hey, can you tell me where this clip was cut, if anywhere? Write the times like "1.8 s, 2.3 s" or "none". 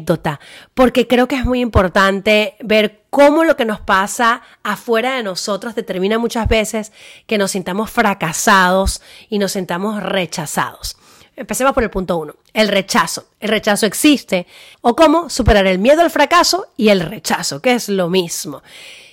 14.7 s